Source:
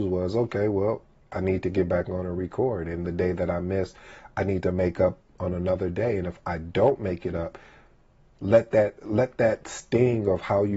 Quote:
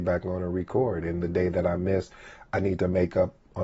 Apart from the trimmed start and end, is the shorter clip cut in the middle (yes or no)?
no